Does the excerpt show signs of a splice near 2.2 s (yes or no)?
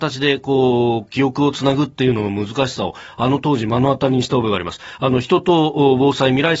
no